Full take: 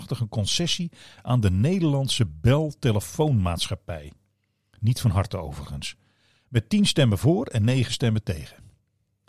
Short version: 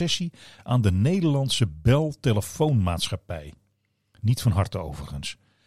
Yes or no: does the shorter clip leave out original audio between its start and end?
no